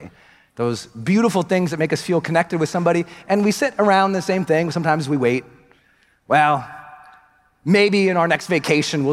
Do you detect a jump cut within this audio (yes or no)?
no